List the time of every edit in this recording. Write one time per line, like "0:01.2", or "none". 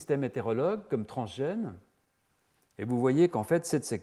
0:02.6